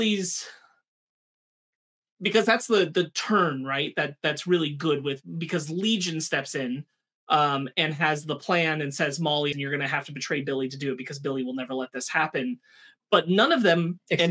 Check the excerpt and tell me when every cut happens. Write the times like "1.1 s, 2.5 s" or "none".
9.5 s